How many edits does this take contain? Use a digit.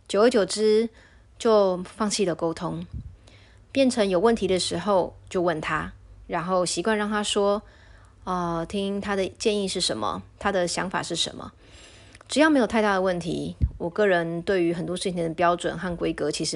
0